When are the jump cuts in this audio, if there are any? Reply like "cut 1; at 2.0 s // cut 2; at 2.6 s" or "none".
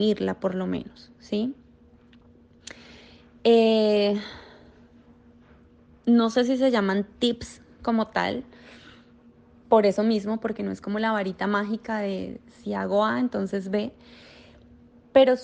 none